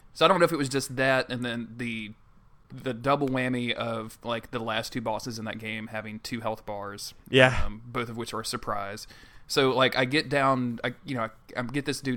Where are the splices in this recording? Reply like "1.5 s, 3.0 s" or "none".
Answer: none